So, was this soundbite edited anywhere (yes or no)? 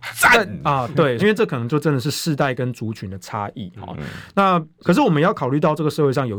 yes